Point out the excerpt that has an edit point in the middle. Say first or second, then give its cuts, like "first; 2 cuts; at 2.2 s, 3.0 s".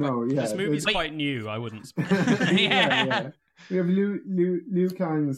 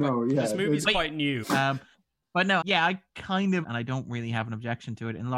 second; 3 cuts; at 1.4 s, 2.6 s, 3.6 s